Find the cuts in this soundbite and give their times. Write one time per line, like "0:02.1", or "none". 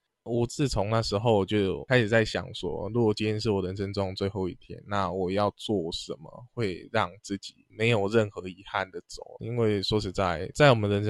0:09.4